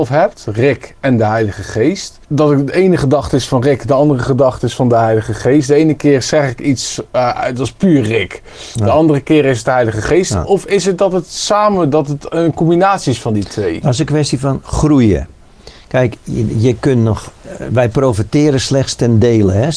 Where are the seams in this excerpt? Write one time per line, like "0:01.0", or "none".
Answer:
0:02.2